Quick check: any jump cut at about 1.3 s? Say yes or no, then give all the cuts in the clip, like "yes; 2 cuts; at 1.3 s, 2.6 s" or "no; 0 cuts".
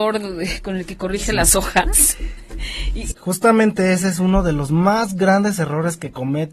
no; 1 cut; at 3.1 s